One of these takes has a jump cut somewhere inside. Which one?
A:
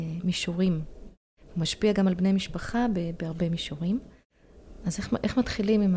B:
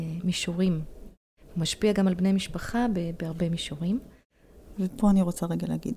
B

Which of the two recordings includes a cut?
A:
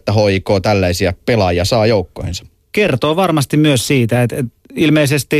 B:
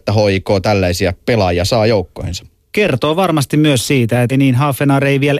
B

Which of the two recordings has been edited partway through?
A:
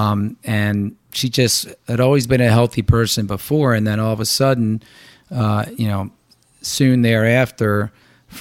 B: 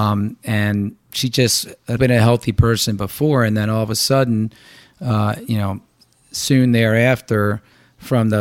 B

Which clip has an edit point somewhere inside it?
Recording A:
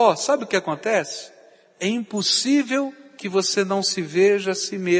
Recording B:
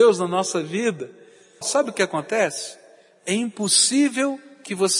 B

